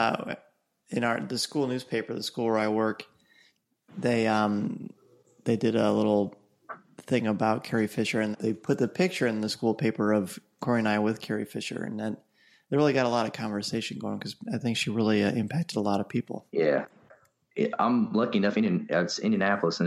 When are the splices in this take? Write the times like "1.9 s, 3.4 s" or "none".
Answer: 8.3 s, 16.5 s